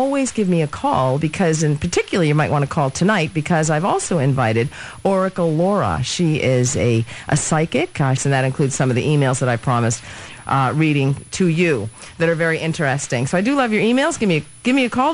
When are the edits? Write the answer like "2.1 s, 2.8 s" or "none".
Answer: 8.2 s

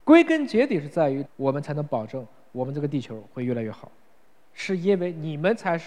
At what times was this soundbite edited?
1.3 s

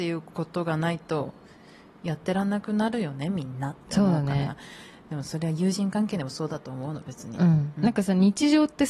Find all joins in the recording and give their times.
none

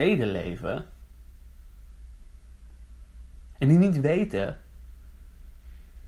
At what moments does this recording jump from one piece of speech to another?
none

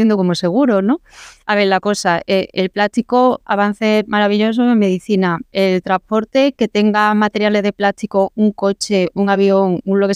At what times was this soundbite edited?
none

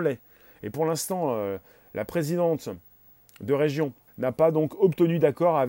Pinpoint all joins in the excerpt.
4.1 s

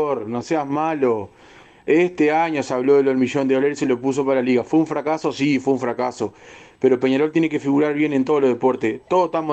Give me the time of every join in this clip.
none

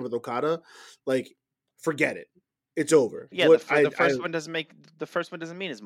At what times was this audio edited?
3.3 s

